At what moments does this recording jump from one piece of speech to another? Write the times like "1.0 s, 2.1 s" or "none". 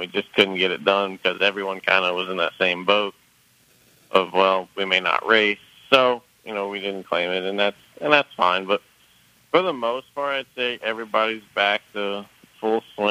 none